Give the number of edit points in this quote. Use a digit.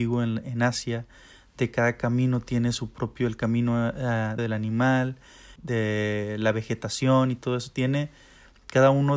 2